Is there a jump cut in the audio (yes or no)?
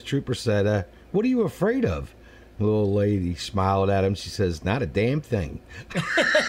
no